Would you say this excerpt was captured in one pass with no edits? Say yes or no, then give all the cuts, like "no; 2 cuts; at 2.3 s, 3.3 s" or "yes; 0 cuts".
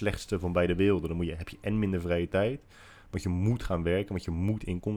yes; 0 cuts